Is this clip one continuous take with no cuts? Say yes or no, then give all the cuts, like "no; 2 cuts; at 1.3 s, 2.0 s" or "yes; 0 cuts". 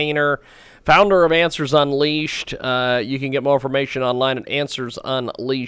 yes; 0 cuts